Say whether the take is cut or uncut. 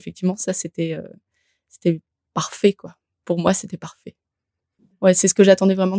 uncut